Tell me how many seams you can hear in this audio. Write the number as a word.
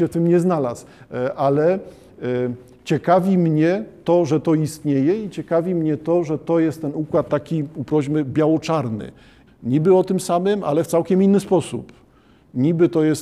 one